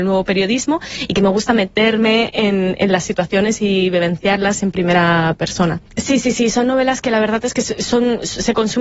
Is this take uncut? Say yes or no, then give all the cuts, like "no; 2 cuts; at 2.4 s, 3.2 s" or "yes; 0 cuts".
no; 1 cut; at 5.9 s